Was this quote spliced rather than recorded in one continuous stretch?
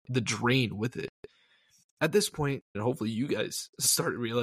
yes; 1 cut; at 2.7 s

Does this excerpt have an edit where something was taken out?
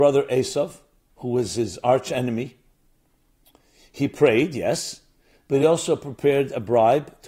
no; 0 cuts

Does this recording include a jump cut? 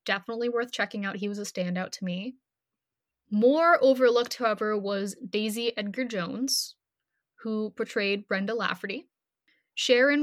no; 0 cuts

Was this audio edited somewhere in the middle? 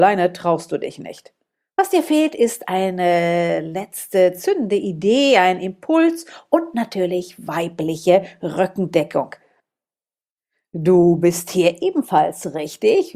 no; 0 cuts

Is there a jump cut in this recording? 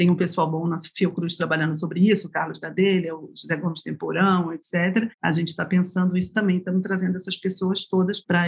no; 0 cuts

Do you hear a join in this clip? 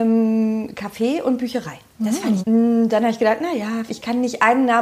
yes; 2 cuts; at 2.4 s, 3.9 s

